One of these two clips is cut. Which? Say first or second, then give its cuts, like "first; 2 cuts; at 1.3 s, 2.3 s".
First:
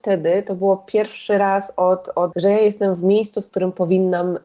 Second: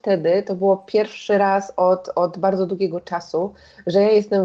first; 1 cut; at 2.3 s